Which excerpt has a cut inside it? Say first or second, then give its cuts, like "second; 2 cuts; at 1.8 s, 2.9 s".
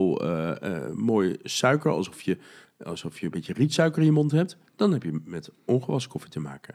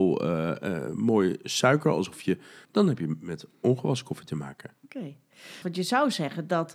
second; 2 cuts; at 2.7 s, 5.6 s